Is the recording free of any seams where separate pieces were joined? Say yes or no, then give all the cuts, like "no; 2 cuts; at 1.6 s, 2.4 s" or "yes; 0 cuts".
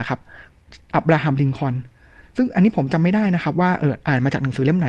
no; 1 cut; at 0.9 s